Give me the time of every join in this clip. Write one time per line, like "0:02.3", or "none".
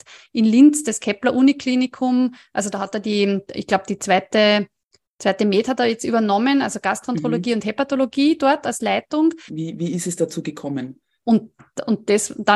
0:09.5
0:11.2